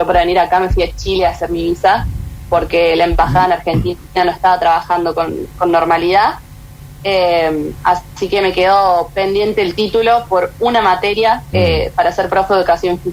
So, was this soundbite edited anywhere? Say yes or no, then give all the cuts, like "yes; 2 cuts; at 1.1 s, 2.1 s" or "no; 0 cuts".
no; 0 cuts